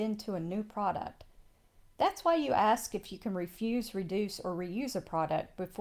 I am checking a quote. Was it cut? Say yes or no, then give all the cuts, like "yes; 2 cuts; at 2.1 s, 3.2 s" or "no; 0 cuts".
no; 0 cuts